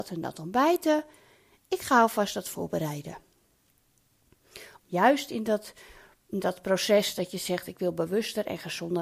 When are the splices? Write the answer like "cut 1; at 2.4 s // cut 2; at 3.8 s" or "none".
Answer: cut 1; at 4.8 s